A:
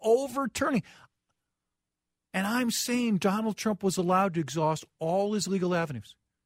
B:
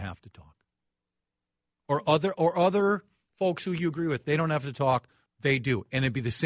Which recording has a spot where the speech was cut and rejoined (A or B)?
B